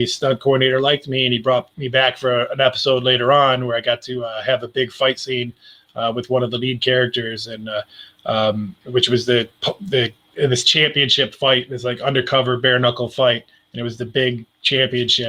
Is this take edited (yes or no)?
no